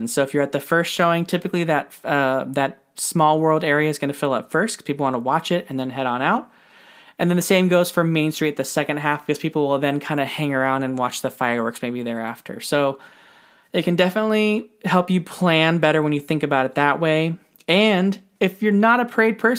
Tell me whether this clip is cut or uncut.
uncut